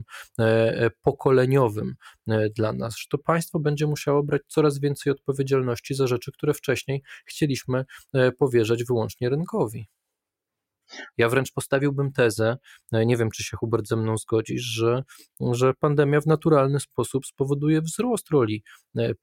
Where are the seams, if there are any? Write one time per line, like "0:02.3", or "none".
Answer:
0:11.1